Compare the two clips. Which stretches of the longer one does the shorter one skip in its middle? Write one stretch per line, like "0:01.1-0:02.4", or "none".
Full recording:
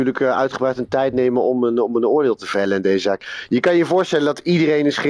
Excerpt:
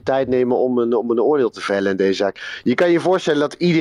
none